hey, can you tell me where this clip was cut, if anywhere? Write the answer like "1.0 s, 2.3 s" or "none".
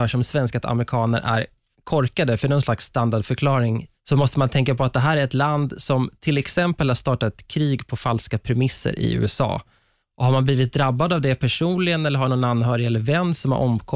3.9 s

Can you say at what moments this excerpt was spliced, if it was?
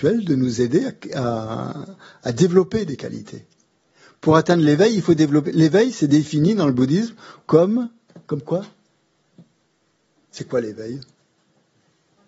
none

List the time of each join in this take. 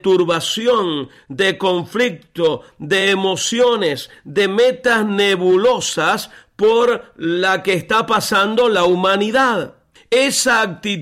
10.0 s

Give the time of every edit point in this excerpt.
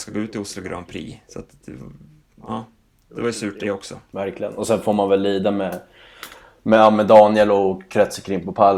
none

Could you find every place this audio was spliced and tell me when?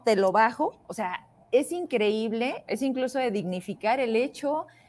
2.7 s

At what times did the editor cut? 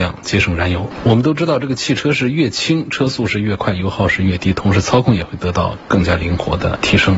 none

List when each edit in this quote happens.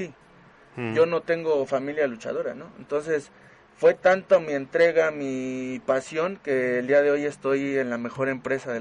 none

